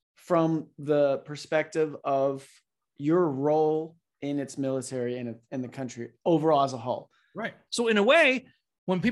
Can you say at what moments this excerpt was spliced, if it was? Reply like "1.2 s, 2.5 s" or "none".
7.7 s

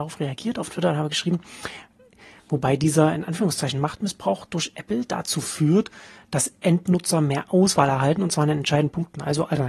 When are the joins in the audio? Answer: none

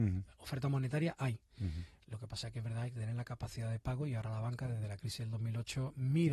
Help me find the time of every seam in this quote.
none

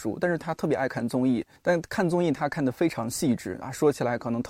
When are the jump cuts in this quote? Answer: 1.6 s

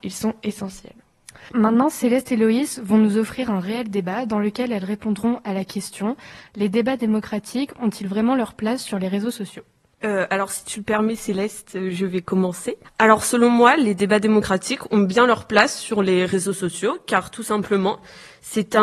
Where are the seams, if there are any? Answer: 1.5 s, 12.8 s

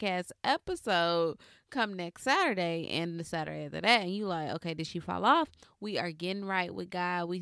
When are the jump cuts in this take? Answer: 5.6 s

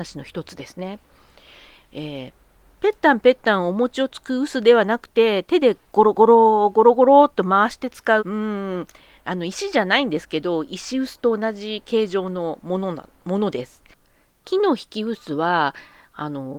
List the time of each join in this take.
1.8 s, 8.2 s

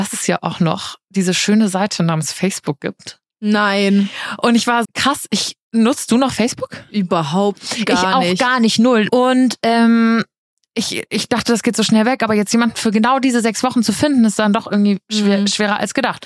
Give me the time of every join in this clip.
4.8 s, 9.1 s

